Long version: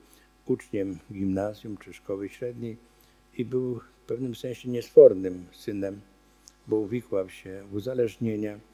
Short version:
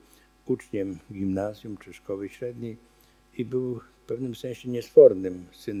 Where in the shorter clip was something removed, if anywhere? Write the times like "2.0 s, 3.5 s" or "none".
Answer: none